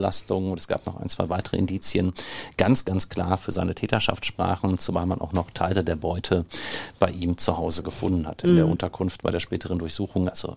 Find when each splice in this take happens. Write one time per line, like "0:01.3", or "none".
none